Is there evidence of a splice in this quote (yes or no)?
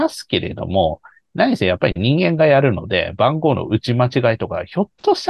no